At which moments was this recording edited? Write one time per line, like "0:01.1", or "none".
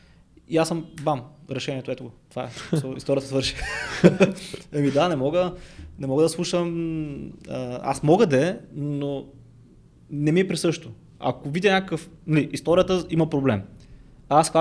none

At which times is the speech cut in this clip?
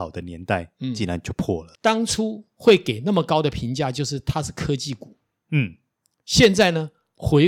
0:01.8

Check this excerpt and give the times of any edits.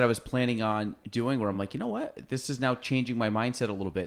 none

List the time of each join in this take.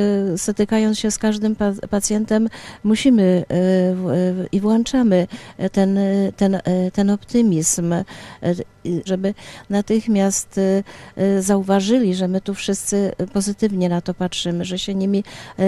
0:09.1

